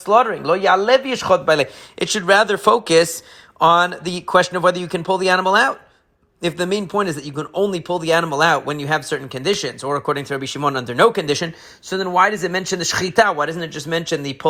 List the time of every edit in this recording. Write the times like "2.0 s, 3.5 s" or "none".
none